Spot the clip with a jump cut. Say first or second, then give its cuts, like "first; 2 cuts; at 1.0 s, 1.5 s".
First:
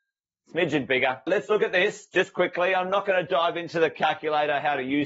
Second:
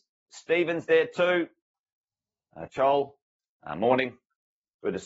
first; 1 cut; at 1.3 s